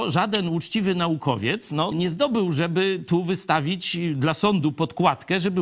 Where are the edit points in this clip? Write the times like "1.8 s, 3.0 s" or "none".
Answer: 1.9 s